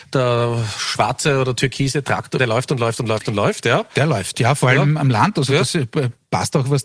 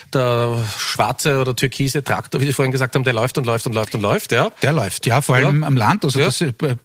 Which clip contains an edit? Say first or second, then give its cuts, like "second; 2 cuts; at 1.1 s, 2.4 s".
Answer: first; 1 cut; at 2.4 s